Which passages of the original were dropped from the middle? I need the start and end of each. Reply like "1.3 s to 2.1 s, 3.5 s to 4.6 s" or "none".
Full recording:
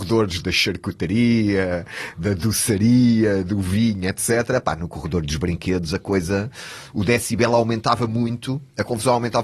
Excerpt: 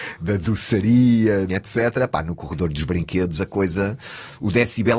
3.4 s to 4.0 s

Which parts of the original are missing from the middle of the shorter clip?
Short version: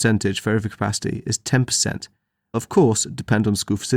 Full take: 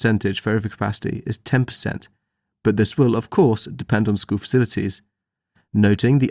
2.5 s to 3.1 s

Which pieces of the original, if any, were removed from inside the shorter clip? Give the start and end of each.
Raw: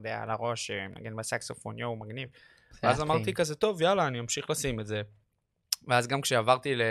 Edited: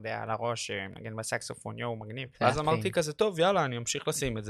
2.3 s to 2.8 s

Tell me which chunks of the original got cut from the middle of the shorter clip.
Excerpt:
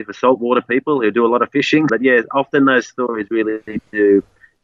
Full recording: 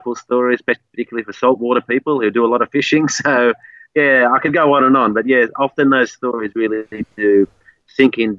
3.1 s to 5.1 s

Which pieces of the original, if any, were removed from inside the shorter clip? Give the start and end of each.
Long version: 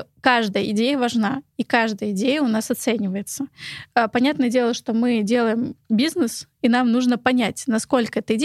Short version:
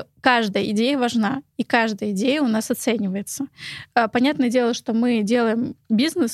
none

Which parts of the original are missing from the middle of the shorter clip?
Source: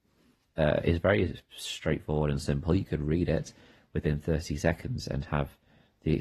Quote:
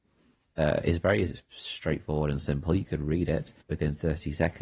3.6 s to 3.9 s

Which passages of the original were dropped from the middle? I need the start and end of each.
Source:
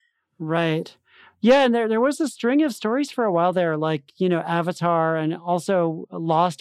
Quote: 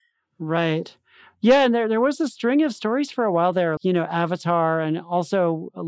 3.8 s to 4.1 s

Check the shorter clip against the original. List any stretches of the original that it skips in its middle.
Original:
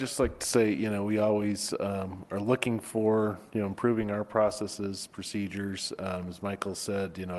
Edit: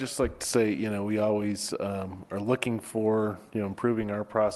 none

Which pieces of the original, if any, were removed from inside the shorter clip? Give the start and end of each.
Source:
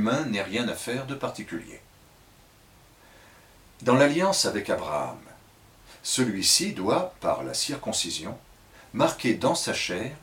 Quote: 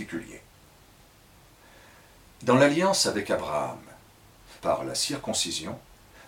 6.0 s to 7.2 s

